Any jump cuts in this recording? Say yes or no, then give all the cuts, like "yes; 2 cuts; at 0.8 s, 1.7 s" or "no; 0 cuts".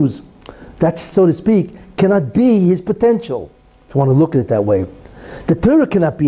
yes; 1 cut; at 1.1 s